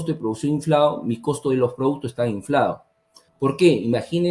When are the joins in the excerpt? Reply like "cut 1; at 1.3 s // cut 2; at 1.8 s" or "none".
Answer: cut 1; at 3.3 s